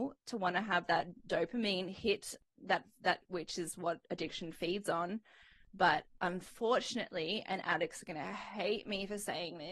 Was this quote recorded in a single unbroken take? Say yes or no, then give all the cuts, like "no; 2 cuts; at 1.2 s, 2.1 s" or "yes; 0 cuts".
no; 1 cut; at 2.6 s